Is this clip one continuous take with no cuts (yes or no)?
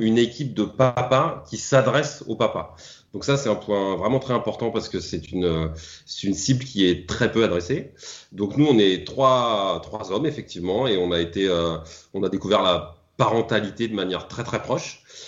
yes